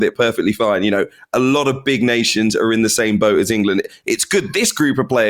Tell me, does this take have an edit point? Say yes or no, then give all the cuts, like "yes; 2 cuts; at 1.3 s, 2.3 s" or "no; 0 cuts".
no; 0 cuts